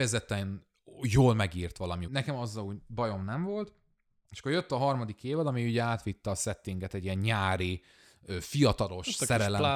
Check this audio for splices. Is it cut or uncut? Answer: cut